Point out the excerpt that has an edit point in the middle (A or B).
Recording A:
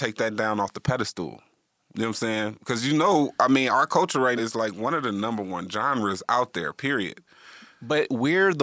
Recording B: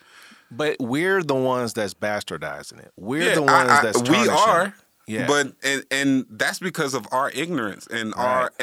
A